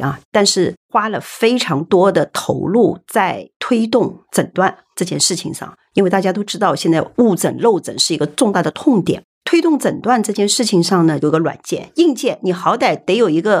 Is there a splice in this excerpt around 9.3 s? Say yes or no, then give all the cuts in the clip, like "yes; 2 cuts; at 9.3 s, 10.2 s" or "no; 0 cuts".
no; 1 cut; at 11.2 s